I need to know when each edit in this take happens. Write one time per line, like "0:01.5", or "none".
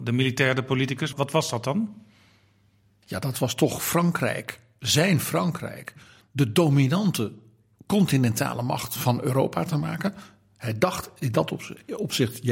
0:01.1